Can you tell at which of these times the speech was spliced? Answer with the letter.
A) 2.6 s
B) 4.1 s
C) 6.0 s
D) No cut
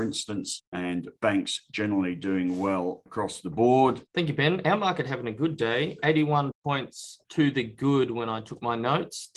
B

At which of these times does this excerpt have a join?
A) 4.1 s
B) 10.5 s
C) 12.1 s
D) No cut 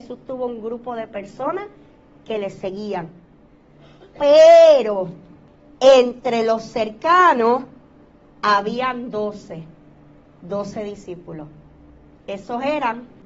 D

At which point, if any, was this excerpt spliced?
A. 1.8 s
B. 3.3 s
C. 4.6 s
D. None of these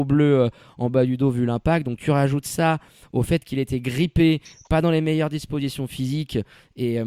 D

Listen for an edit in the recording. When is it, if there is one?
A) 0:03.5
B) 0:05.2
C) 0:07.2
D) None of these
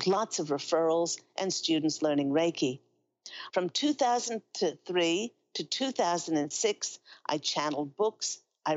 A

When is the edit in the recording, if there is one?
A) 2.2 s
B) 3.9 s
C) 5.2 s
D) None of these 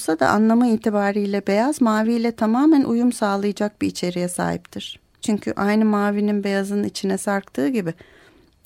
C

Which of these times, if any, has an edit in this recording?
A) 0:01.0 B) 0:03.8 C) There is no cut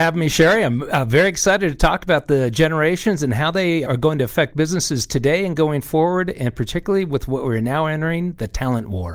B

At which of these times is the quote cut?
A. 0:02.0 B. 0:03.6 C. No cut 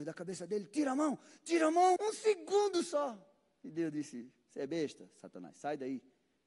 A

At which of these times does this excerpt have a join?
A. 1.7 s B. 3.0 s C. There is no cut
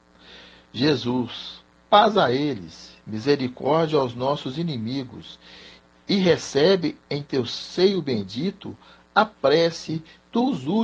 C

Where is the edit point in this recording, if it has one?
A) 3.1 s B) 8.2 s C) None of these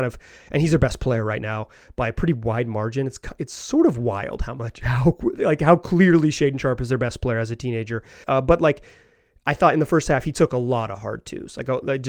B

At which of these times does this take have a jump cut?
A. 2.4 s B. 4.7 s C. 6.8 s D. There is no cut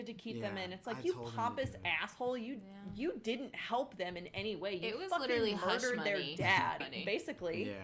C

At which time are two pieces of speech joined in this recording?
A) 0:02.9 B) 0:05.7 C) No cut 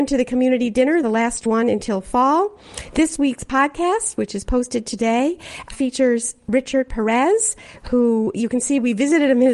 B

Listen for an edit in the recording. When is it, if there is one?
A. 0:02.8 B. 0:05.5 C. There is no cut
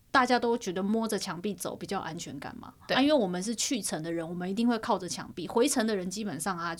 C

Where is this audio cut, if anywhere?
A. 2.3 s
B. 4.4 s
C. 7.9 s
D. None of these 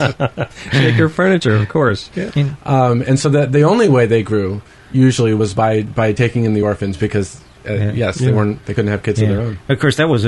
A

